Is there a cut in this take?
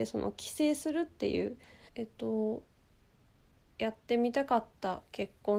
yes; 1 cut; at 1.9 s

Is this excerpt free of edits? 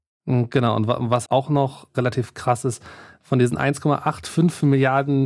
no; 1 cut; at 1.3 s

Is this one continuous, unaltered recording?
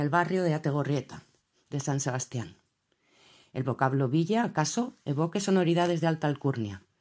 yes; 0 cuts

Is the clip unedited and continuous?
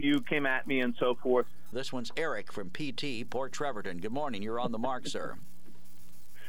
no; 1 cut; at 1.7 s

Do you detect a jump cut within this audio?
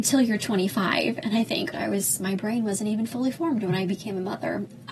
yes; 1 cut; at 1.7 s

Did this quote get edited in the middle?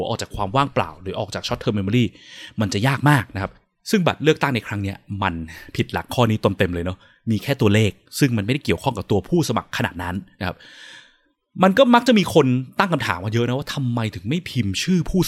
no; 0 cuts

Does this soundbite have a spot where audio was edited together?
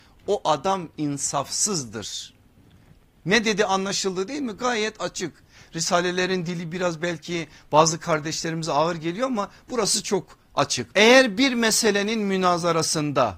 yes; 1 cut; at 10.9 s

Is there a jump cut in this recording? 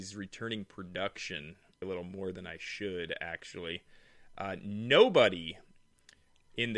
yes; 1 cut; at 1.8 s

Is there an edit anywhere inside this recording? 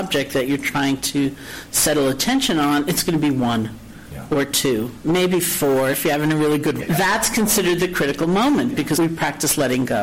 yes; 2 cuts; at 6.8 s, 8.9 s

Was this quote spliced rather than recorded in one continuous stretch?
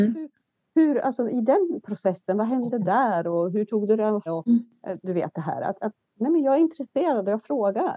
yes; 1 cut; at 4.3 s

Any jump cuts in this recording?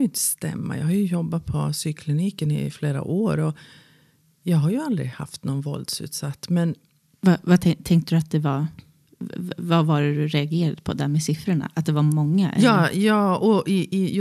no; 0 cuts

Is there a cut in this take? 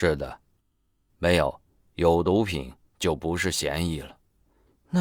yes; 1 cut; at 1.1 s

